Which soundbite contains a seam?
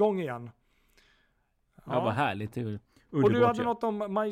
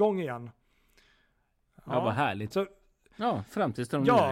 second; 1 cut; at 2.5 s

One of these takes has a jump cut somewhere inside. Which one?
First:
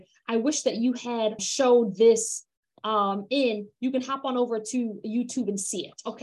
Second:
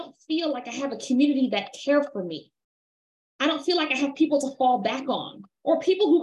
first; 1 cut; at 1.4 s

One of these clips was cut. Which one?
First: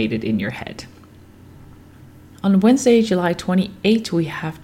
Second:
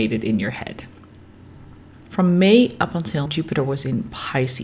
second; 2 cuts; at 2.0 s, 3.3 s

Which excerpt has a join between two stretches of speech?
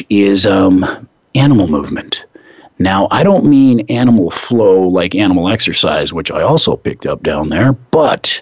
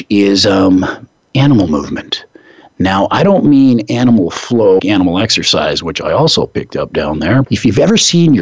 second; 2 cuts; at 4.8 s, 7.4 s

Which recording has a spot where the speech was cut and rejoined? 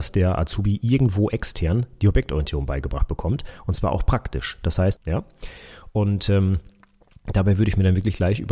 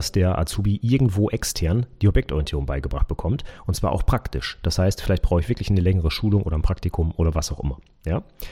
first; 1 cut; at 5.0 s

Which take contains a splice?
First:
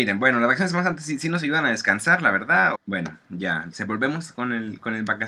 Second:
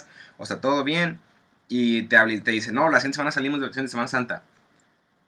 first; 1 cut; at 2.7 s

